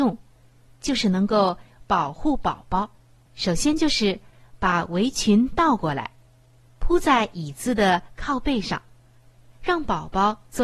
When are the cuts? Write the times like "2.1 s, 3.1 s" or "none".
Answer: 3.3 s